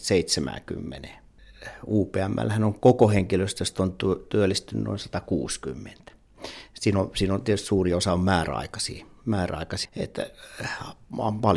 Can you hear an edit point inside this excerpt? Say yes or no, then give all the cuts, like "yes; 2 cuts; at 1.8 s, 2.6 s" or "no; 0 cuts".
yes; 1 cut; at 9.9 s